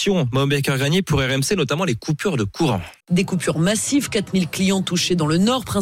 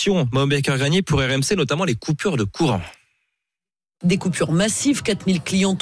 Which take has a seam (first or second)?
first